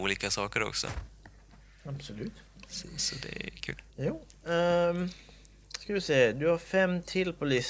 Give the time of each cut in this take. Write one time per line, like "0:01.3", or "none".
0:03.9